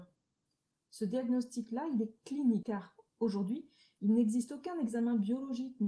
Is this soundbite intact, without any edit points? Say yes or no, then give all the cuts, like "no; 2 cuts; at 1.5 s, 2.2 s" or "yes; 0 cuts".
no; 1 cut; at 2.6 s